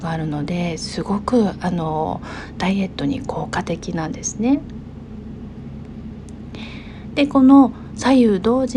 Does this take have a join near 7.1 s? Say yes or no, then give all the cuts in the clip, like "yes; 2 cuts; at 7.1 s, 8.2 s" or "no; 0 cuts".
no; 0 cuts